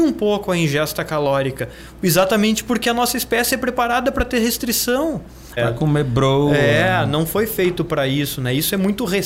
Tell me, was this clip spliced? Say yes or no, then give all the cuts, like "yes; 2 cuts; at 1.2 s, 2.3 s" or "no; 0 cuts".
yes; 1 cut; at 5.6 s